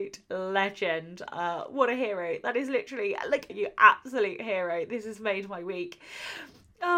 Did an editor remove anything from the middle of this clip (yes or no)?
yes